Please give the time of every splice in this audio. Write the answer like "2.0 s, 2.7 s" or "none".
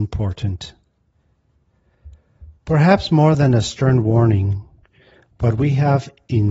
none